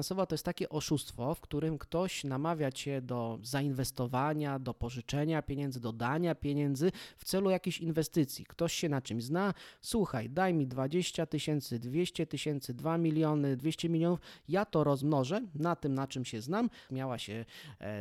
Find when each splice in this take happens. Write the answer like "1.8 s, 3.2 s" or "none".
13.6 s, 16.9 s